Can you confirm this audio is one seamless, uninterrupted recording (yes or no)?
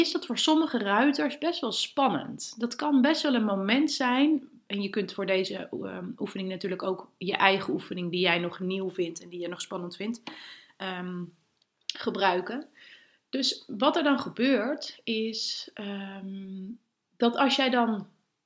yes